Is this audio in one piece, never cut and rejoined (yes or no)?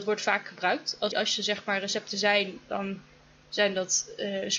no